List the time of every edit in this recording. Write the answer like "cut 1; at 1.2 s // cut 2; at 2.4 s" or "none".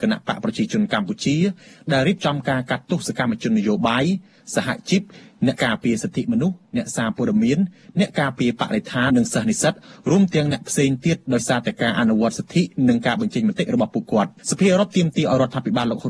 cut 1; at 5.6 s // cut 2; at 9.1 s // cut 3; at 14.4 s